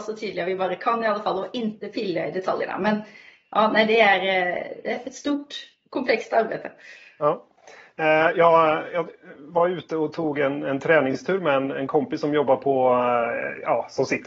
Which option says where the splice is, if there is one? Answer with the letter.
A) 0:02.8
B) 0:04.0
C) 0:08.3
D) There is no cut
D